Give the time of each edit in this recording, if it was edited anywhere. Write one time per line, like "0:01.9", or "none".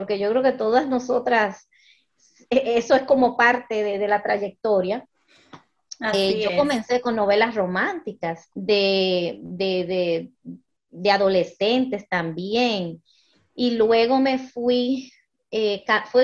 0:08.5